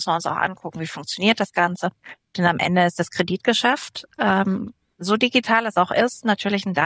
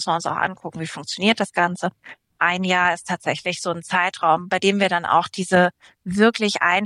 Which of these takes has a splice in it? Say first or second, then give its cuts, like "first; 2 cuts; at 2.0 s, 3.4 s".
second; 1 cut; at 2.3 s